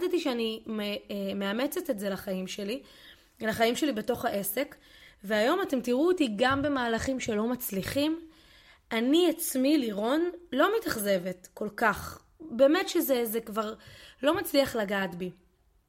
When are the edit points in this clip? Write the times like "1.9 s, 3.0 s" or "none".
none

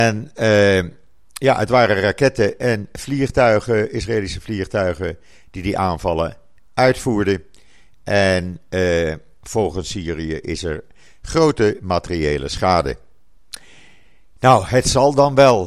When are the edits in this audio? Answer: none

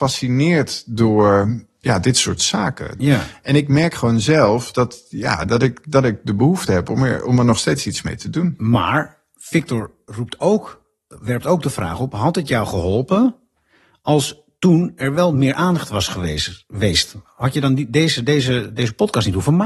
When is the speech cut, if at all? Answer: 3.0 s

